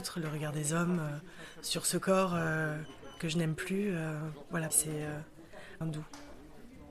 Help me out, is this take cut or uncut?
cut